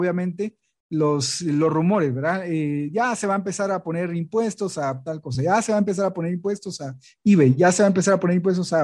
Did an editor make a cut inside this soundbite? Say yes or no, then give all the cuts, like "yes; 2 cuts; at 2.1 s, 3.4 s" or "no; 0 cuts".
no; 0 cuts